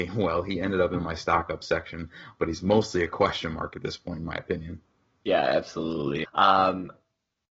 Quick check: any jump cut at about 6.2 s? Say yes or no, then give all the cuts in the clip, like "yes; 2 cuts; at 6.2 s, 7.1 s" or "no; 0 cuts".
yes; 1 cut; at 6.2 s